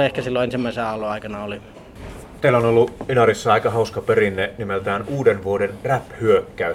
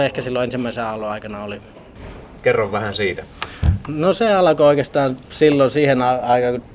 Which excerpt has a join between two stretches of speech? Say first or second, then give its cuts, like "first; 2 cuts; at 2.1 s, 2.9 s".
second; 1 cut; at 2.4 s